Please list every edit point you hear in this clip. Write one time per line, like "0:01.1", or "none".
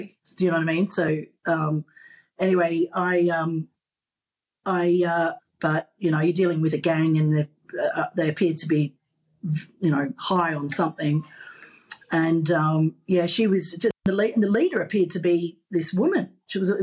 0:05.4